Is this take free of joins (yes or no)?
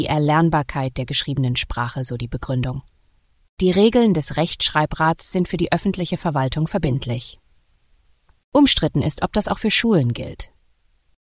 yes